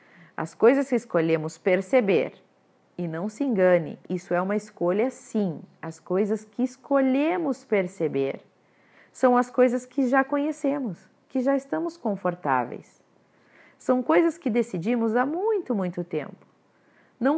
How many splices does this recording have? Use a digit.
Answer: 0